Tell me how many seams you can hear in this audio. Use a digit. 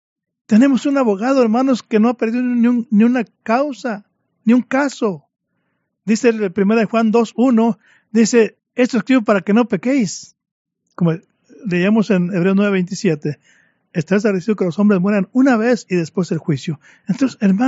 2